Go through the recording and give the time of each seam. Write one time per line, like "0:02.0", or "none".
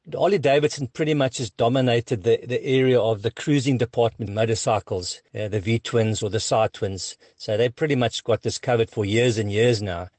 0:04.3